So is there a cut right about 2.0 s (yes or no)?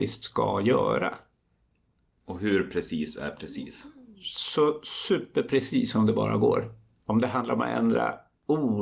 no